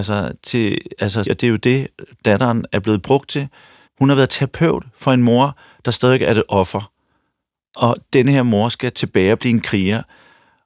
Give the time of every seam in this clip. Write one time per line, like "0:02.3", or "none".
0:01.3
0:03.9